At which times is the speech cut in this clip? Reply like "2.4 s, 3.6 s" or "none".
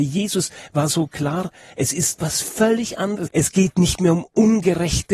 3.3 s